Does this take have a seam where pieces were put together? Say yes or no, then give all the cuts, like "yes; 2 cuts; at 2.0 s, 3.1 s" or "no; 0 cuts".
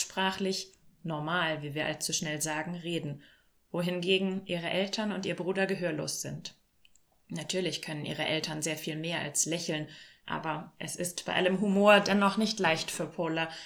yes; 1 cut; at 10.2 s